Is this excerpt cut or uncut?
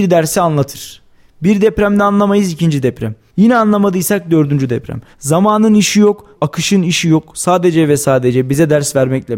cut